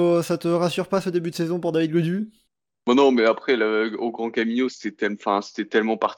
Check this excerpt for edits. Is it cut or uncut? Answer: uncut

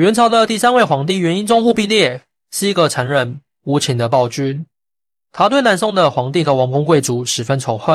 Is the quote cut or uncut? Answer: uncut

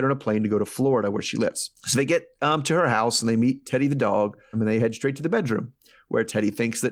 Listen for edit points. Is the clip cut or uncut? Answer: cut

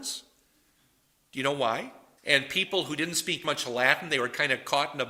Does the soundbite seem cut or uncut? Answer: cut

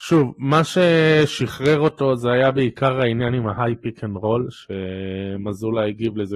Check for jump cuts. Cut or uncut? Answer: uncut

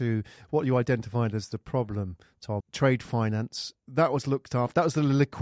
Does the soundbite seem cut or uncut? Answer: cut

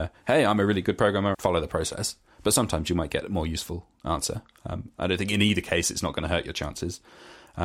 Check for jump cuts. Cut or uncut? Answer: cut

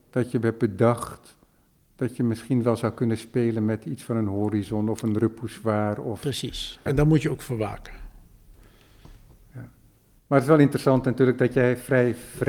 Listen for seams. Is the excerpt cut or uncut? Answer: cut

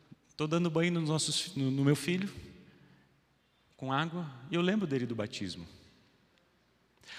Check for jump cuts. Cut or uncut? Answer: uncut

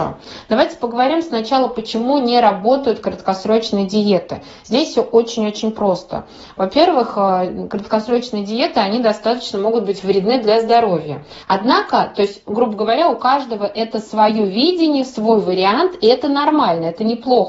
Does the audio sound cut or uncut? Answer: cut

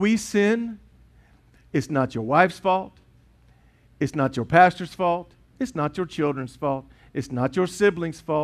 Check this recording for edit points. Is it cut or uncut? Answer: uncut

